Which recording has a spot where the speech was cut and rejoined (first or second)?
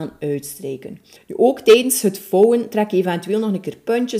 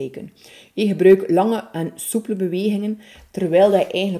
first